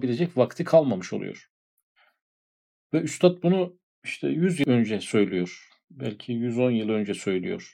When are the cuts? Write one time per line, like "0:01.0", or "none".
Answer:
none